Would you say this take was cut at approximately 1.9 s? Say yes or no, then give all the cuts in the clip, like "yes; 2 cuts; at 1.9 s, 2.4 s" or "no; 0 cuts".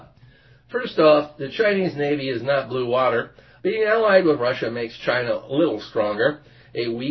no; 1 cut; at 3.6 s